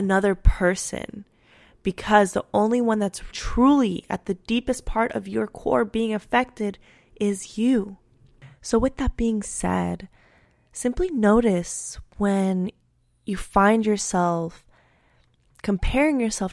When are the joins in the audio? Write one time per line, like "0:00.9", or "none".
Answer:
0:03.3

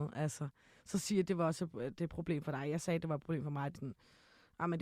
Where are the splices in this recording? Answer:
0:03.7

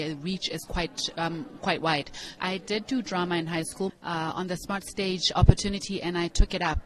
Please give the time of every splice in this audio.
0:02.4
0:03.9

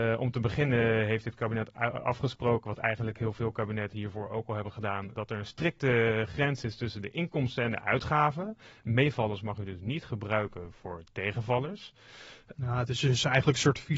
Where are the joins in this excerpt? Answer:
0:05.1
0:12.5

